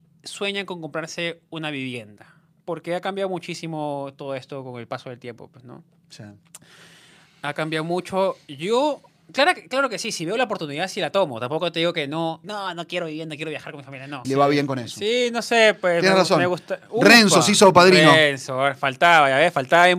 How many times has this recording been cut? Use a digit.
2